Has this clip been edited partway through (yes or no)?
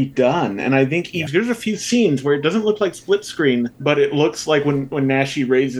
yes